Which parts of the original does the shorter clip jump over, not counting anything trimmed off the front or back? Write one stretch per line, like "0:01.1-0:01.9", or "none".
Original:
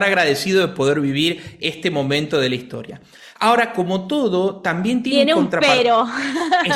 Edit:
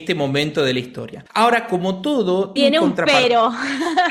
0:03.0-0:03.3
0:04.6-0:05.1